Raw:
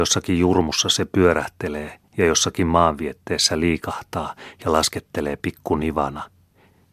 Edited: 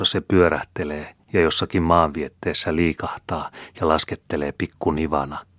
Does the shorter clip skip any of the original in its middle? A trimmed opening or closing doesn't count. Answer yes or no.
no